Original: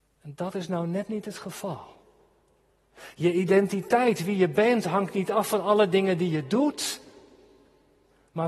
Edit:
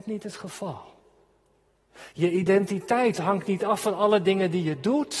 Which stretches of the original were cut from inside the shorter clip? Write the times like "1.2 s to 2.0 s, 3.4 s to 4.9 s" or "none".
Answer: 4.2 s to 4.8 s